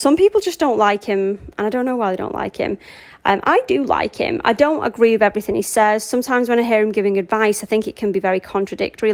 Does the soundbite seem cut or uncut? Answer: uncut